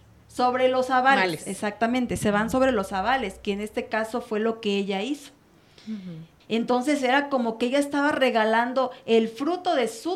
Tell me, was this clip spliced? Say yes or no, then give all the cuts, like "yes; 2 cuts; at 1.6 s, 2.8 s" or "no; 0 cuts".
yes; 1 cut; at 6.4 s